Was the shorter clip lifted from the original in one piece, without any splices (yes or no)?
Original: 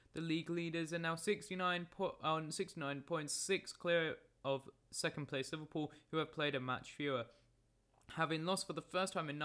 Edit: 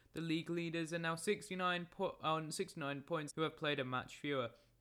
no